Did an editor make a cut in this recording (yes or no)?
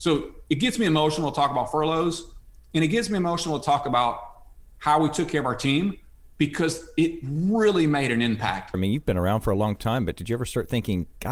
yes